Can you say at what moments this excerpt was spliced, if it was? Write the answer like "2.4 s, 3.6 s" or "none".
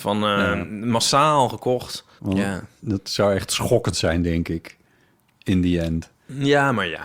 2.2 s